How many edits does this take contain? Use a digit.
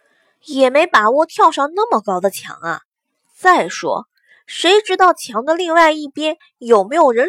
0